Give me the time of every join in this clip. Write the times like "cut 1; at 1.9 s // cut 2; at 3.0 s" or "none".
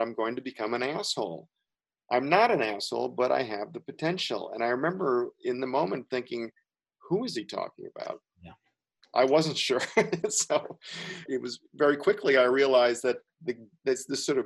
cut 1; at 11.3 s // cut 2; at 13.3 s